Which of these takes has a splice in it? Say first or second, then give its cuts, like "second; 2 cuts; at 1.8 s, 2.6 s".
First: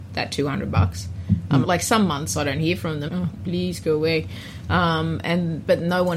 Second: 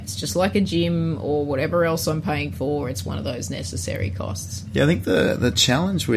first; 2 cuts; at 1.6 s, 3.1 s